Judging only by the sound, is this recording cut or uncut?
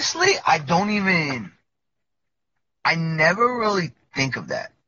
uncut